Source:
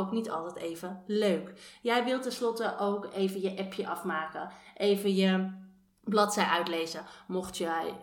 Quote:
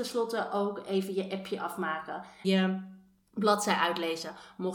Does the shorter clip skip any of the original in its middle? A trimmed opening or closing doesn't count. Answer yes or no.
yes